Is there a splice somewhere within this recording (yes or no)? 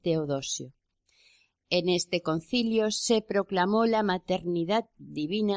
no